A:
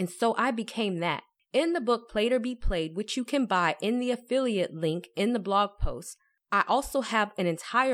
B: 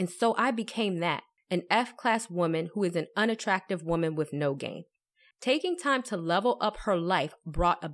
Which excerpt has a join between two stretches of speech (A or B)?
B